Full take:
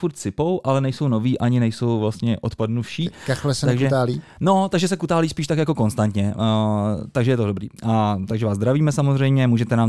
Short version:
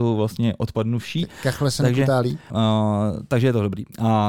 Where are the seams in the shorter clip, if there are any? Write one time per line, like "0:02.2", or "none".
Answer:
0:02.5